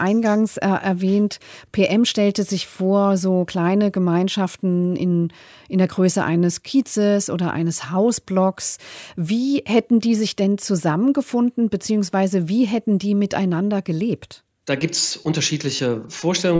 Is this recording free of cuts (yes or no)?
yes